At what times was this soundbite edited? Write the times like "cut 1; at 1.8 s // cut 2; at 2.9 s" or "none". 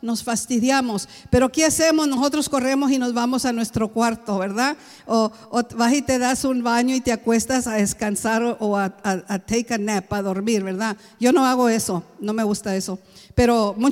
none